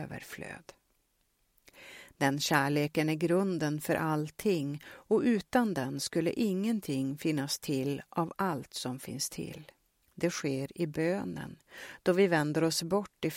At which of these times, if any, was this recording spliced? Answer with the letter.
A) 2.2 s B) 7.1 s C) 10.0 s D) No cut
C